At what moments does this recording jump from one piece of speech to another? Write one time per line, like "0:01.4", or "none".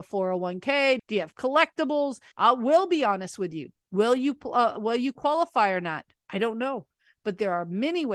0:01.0
0:02.3